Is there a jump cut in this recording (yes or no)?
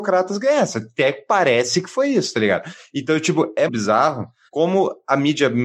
yes